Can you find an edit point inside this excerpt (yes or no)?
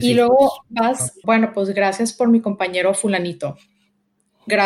yes